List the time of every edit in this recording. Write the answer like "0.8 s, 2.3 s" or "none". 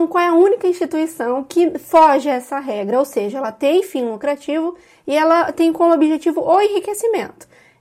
none